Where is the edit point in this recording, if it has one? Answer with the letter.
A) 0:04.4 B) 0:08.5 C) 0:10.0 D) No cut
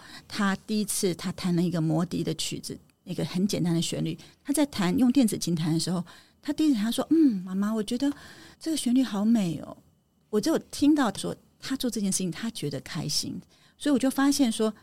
B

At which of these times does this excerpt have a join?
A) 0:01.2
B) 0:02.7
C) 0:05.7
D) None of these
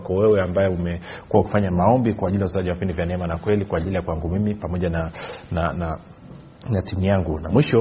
C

